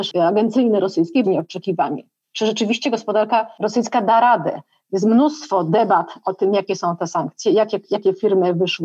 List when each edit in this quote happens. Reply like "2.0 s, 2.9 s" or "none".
1.2 s